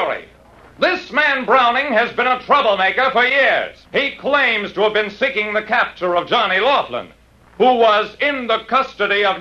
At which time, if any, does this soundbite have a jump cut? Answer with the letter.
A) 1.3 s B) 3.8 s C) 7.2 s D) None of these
B